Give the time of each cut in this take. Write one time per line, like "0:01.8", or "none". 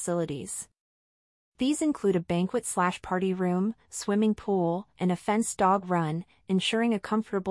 0:04.9